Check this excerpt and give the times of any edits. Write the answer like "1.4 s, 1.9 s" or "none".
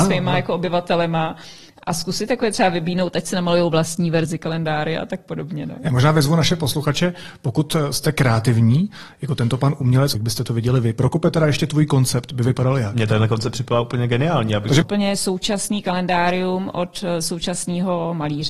10.1 s, 14.8 s

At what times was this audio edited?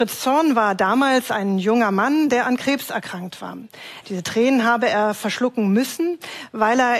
4.0 s

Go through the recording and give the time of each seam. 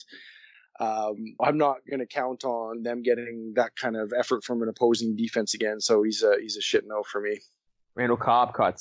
1.4 s

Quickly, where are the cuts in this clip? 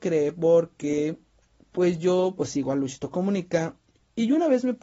none

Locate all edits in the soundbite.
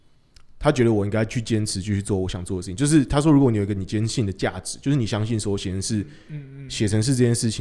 none

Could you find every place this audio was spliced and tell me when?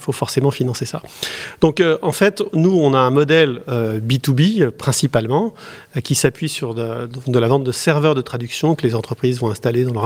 none

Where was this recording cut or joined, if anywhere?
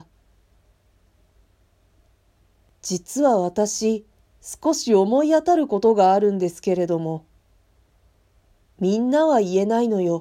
8.7 s

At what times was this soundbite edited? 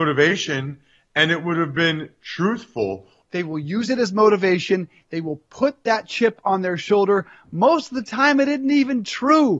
3.2 s

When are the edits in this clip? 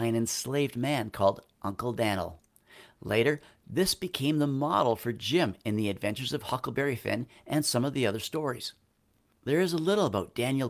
none

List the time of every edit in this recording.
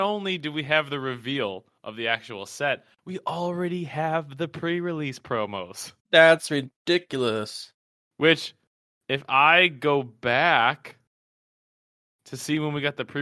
6.0 s

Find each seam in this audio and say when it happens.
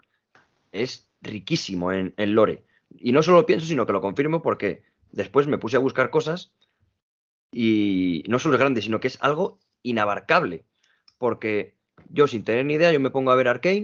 none

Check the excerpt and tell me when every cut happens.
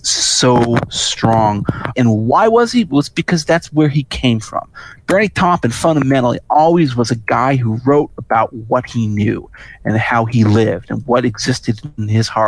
1.9 s

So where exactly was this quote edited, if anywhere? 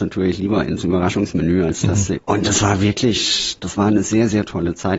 2.2 s, 3.6 s

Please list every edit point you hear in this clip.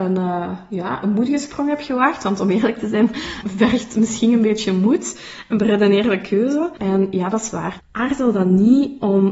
3.4 s, 6.8 s, 7.8 s

